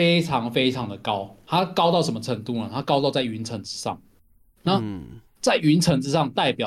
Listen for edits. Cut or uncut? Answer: uncut